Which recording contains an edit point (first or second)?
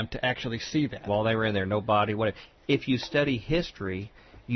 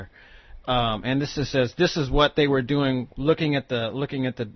first